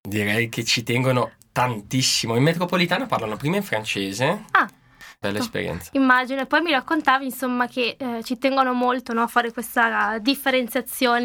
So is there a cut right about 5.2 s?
yes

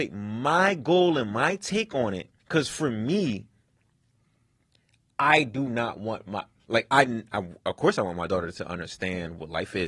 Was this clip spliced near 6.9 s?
no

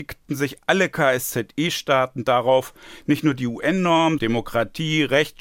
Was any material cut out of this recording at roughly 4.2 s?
yes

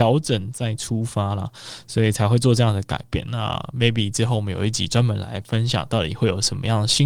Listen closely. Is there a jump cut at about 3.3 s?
yes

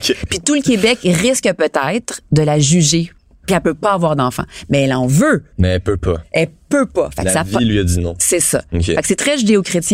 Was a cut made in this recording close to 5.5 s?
yes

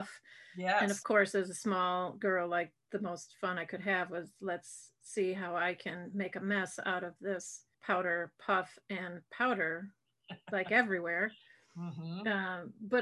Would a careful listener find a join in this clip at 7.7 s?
yes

